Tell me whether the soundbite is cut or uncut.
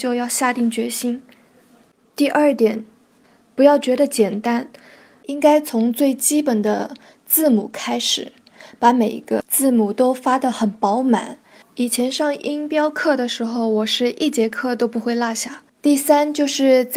cut